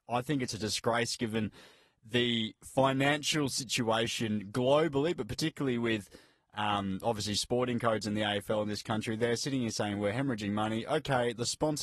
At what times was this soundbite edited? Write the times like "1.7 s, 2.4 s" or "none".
none